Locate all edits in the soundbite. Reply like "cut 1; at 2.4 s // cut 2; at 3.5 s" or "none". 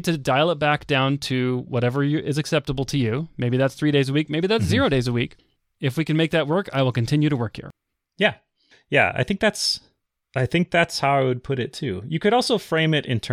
none